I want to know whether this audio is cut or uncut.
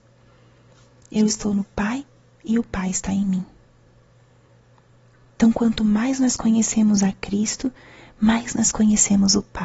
uncut